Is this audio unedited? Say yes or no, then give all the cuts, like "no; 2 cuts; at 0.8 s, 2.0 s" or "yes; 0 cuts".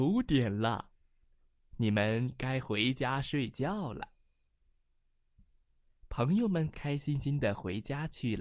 no; 1 cut; at 6.7 s